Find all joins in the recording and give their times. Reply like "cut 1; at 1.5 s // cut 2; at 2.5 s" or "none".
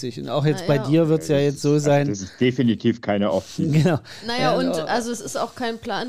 none